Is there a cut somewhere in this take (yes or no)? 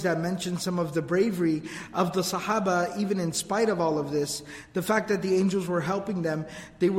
no